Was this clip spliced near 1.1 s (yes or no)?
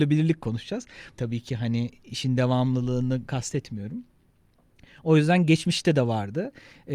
yes